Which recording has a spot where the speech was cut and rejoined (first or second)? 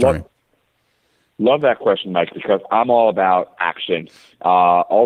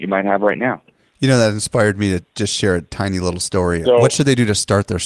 second